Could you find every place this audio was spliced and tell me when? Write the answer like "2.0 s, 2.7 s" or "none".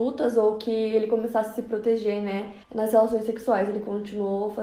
2.6 s